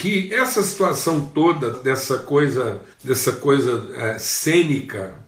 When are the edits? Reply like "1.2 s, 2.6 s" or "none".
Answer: 1.7 s, 2.9 s